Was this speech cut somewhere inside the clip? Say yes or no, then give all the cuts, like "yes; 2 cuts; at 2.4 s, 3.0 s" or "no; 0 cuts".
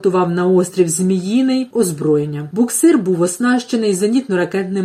yes; 1 cut; at 1.7 s